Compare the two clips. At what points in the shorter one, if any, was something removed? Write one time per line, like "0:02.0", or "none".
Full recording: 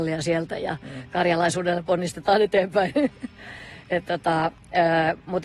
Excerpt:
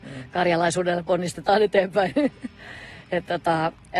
none